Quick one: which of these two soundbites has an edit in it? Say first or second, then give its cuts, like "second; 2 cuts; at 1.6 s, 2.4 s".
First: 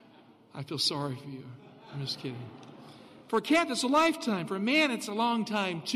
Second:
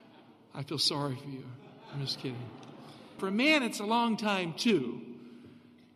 second; 1 cut; at 3.2 s